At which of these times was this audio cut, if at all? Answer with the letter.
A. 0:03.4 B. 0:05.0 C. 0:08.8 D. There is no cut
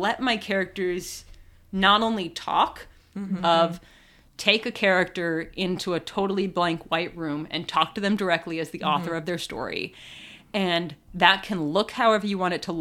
A